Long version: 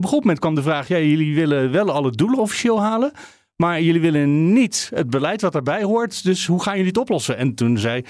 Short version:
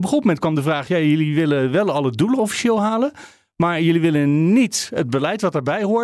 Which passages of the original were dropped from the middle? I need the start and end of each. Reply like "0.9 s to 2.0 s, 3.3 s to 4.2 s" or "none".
none